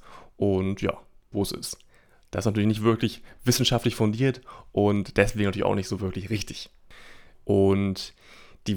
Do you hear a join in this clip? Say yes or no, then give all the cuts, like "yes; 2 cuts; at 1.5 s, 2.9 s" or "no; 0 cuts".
yes; 2 cuts; at 1.3 s, 7.3 s